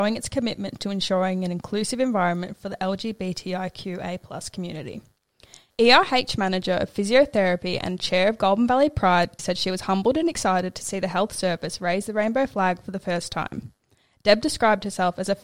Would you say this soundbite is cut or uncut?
cut